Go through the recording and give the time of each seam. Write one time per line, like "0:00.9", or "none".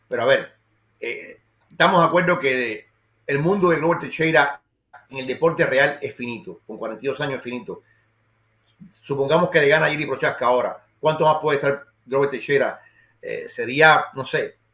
none